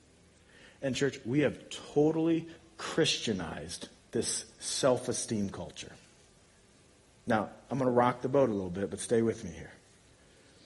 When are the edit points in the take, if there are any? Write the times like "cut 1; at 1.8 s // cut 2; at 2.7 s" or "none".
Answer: none